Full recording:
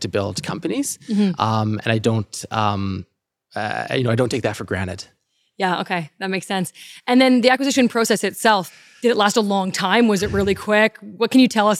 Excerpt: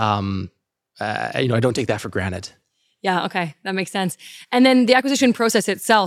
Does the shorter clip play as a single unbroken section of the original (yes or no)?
yes